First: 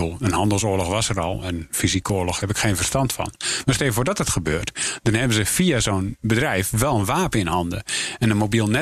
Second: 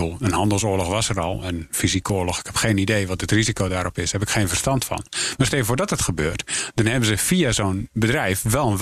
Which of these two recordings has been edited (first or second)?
first